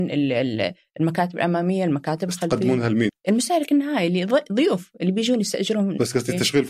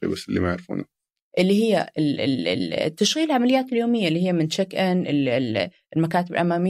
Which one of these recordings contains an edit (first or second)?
first